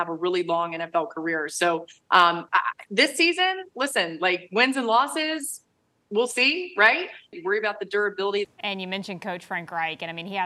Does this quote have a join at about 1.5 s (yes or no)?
no